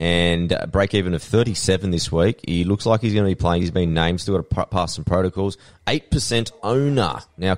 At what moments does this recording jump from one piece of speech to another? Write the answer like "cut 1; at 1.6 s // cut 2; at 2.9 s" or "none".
none